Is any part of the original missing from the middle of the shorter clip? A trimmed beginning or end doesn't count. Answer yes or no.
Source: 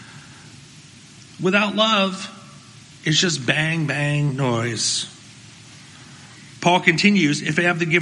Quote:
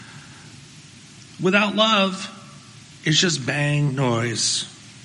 yes